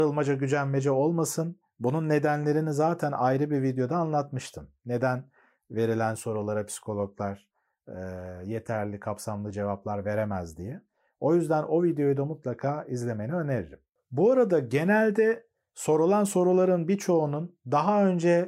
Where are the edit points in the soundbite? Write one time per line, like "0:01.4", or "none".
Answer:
none